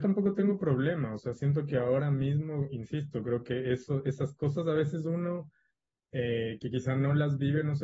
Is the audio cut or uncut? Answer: uncut